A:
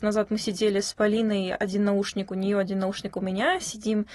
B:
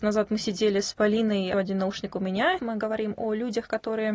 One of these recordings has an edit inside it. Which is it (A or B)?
B